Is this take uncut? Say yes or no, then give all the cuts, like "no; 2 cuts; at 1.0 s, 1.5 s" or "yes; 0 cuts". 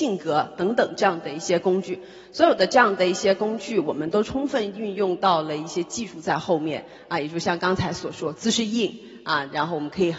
yes; 0 cuts